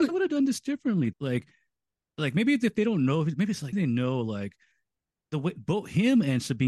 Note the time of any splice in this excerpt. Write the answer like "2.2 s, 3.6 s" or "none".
1.1 s, 3.7 s